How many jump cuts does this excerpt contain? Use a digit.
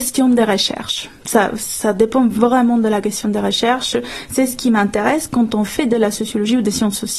0